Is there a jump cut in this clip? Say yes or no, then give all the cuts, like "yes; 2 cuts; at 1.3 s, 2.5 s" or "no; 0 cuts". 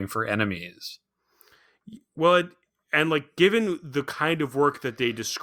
no; 0 cuts